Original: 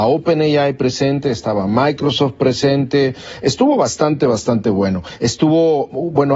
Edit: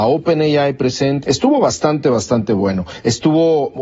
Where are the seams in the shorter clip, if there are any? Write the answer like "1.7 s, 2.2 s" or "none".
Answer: 1.2 s